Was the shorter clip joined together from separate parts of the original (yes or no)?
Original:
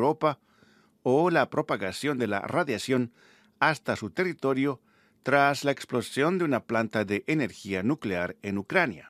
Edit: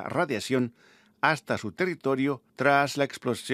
yes